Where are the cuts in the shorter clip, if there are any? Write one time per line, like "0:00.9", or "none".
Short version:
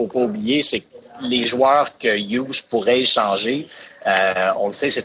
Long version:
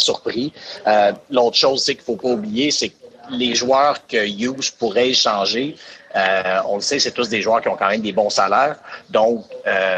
none